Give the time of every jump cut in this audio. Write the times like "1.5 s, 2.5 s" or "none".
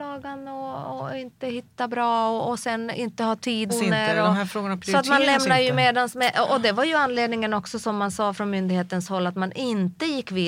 3.7 s